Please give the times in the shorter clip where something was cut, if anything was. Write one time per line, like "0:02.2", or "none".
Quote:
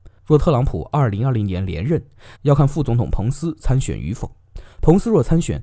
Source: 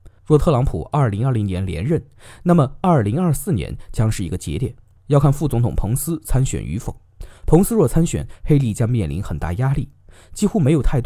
0:02.3